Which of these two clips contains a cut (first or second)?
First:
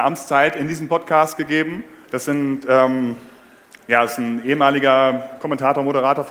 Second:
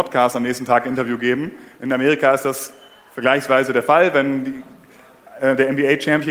first